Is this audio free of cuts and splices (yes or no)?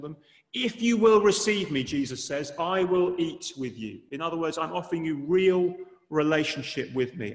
yes